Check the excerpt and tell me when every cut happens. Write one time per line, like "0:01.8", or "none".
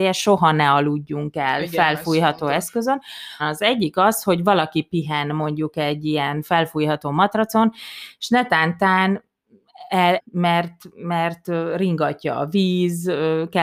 0:03.4
0:10.2